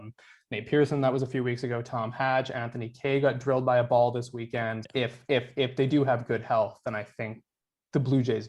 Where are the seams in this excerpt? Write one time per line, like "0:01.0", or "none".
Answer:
0:04.8